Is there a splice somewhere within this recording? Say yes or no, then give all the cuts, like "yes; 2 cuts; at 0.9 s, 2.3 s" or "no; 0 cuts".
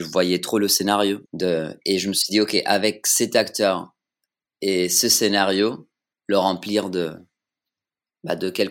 yes; 2 cuts; at 1.3 s, 6.1 s